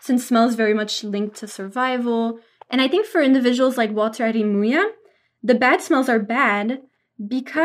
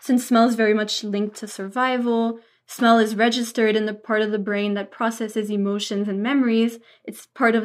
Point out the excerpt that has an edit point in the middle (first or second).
first